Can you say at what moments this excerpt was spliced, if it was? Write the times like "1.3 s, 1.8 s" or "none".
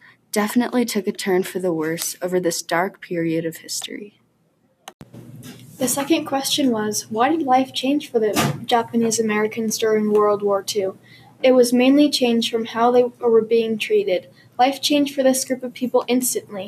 none